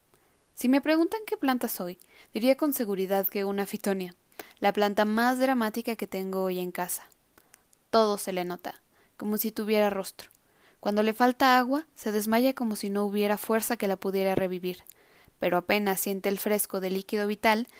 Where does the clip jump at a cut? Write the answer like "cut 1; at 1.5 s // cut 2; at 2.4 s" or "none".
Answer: none